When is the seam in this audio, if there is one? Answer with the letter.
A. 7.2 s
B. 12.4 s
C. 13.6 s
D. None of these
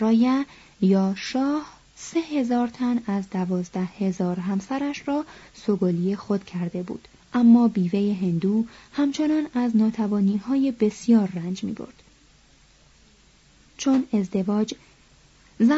A